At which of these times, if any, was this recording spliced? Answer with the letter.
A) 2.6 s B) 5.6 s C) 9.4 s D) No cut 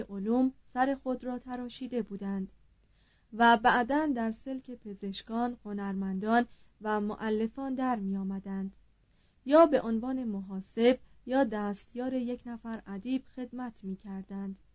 B